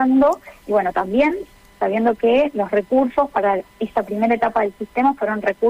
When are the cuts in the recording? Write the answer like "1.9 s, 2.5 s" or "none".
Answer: none